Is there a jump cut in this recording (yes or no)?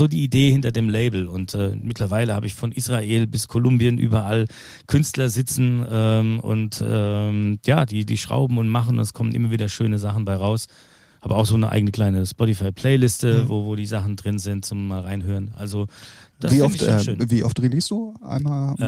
no